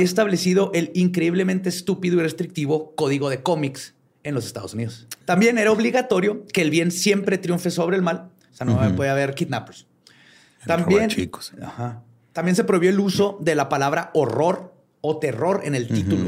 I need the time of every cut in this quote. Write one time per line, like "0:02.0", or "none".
0:05.2
0:08.5